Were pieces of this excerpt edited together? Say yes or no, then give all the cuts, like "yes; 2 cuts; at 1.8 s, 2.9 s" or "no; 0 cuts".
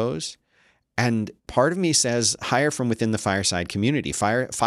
yes; 1 cut; at 1.4 s